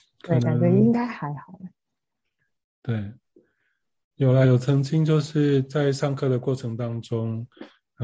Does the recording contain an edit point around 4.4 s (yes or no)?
no